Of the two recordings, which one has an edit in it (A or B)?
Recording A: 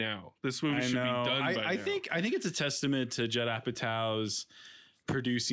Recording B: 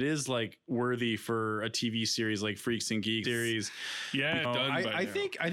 B